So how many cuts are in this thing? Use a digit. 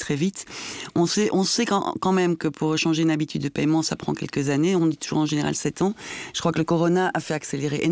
0